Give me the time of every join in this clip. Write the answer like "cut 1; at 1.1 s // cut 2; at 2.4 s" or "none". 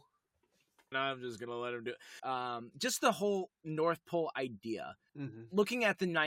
cut 1; at 0.9 s // cut 2; at 2.2 s // cut 3; at 5.1 s